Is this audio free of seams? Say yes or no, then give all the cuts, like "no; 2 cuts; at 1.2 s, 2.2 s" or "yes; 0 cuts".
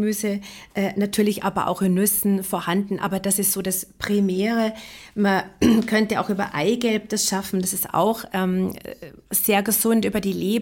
yes; 0 cuts